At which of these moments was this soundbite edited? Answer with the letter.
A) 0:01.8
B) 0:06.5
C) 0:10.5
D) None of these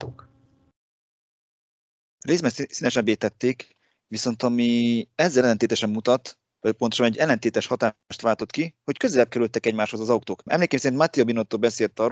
C